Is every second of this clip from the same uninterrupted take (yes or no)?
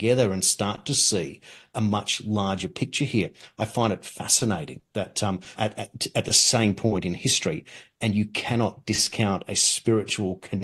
no